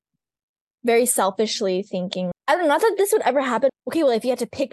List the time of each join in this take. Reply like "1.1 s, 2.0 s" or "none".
2.3 s, 3.7 s